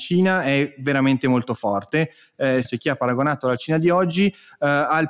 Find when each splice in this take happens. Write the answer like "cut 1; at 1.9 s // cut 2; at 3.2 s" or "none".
cut 1; at 2.6 s